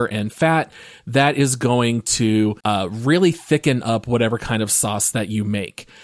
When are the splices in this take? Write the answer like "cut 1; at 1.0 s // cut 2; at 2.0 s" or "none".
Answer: cut 1; at 2.6 s